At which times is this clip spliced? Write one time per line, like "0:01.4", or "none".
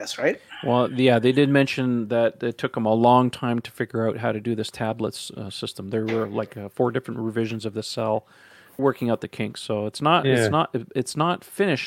0:08.8

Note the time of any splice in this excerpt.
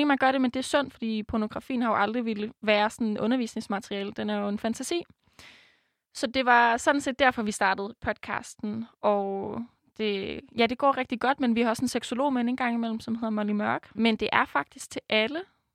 0:13.9

